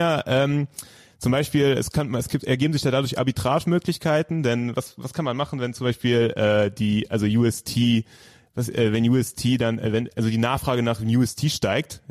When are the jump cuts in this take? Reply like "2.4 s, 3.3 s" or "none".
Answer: none